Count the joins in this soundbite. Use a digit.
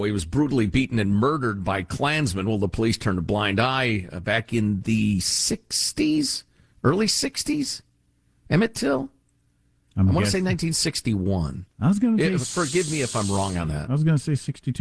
0